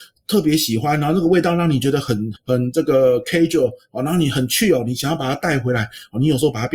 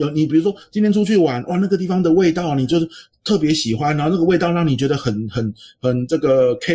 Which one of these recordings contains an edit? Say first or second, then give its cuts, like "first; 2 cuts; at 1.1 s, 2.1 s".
first; 1 cut; at 2.3 s